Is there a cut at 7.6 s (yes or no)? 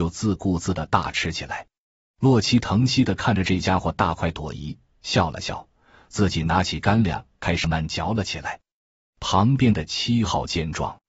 yes